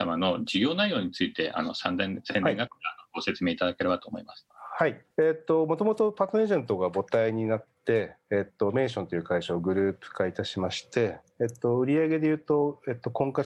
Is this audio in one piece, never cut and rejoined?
no; 1 cut; at 5.1 s

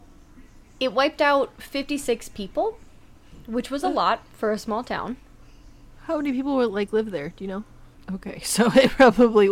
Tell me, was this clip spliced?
yes; 1 cut; at 7.9 s

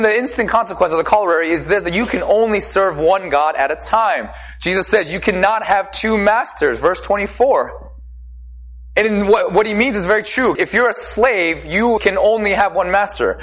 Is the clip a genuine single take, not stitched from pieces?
no; 2 cuts; at 10.6 s, 12.0 s

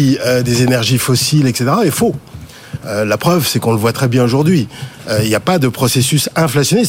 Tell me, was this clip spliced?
yes; 1 cut; at 3.9 s

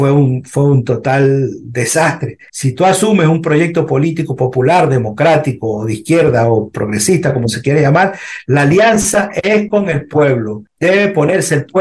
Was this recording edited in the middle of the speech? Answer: yes; 1 cut; at 2.5 s

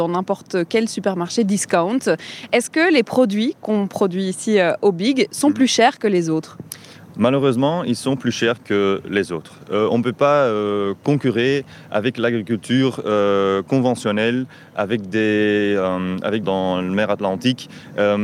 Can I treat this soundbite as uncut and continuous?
no; 1 cut; at 16.4 s

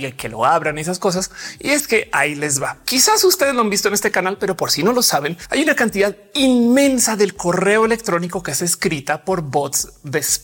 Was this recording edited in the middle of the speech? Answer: yes; 1 cut; at 1.6 s

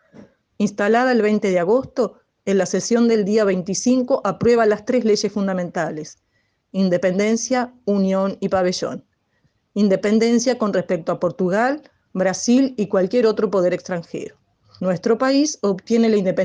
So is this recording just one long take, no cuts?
no; 1 cut; at 14.8 s

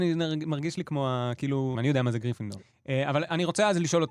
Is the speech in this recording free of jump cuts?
no; 1 cut; at 1.7 s

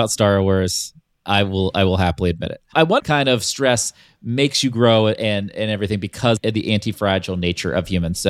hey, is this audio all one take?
no; 1 cut; at 3.0 s

